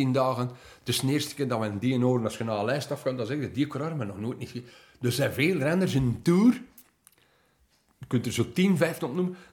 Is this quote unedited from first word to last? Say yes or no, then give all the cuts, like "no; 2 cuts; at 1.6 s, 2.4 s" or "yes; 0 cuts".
yes; 0 cuts